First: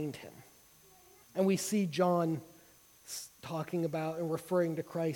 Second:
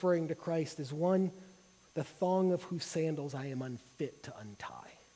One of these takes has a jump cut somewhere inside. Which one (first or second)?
first